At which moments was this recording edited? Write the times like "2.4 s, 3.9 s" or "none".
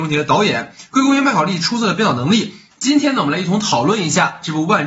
2.7 s